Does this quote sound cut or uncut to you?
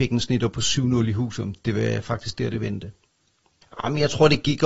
cut